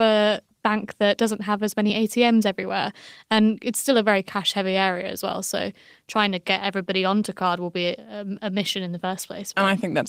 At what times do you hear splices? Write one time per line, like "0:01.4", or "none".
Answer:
none